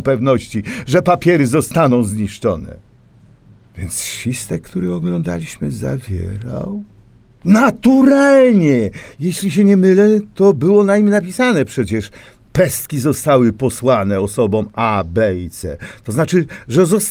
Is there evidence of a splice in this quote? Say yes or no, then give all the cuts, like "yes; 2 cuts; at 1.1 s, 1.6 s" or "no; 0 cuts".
no; 0 cuts